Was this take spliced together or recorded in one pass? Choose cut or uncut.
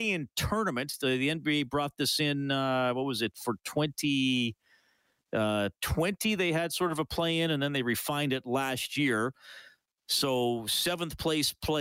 uncut